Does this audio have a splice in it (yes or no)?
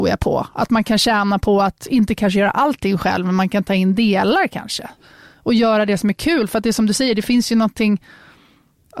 no